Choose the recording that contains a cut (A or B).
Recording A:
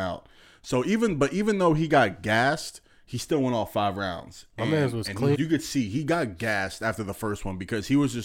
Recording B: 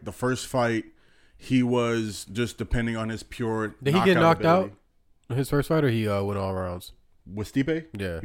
A